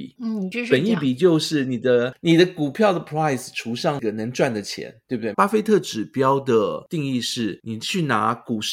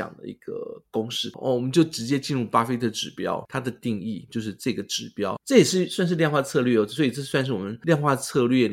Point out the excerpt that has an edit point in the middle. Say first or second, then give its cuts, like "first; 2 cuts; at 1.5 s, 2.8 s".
first; 1 cut; at 5.3 s